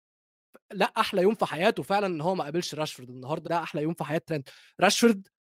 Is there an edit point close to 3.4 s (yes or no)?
yes